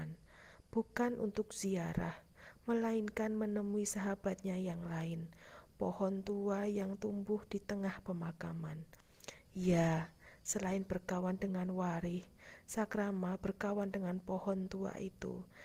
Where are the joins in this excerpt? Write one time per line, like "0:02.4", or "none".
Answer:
none